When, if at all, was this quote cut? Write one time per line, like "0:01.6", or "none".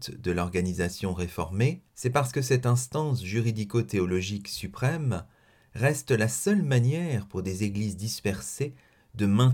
0:01.9

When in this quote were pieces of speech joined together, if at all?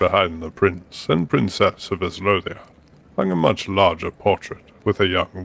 none

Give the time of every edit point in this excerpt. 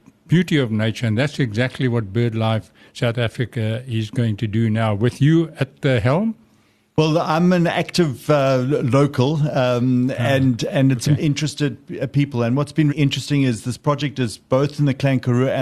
0:11.2
0:12.9

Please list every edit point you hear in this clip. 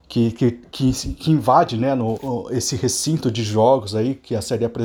0:02.2

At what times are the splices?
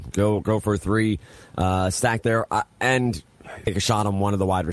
0:03.6

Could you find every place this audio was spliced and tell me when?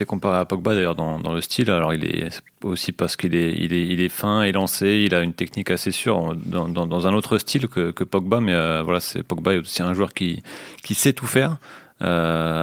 none

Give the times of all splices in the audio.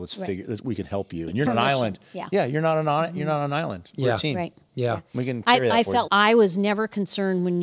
0:01.5
0:06.1

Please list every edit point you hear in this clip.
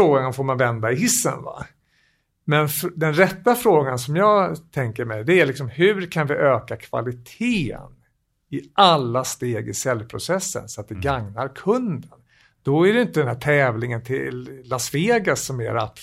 none

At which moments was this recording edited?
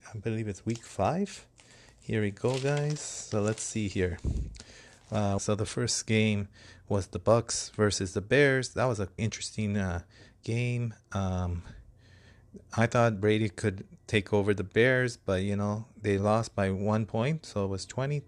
0:05.4
0:09.2

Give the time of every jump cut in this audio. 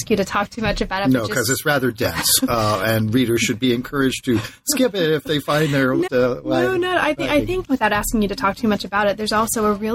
0:06.1
0:07.6

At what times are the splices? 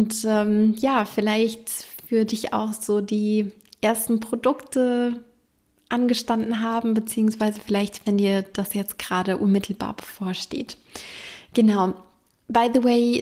none

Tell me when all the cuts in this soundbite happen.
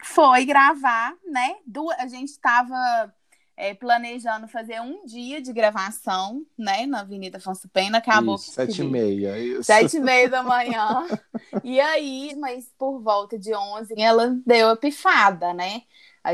0:08.5
0:12.3
0:14.0

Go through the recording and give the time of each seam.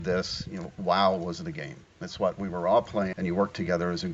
0:03.1

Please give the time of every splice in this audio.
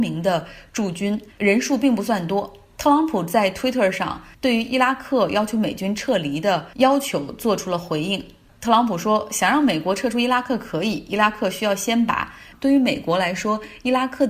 0:01.3
0:12.5

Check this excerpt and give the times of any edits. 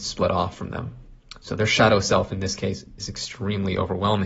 none

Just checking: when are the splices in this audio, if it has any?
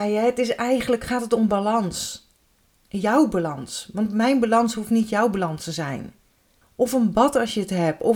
0:06.6

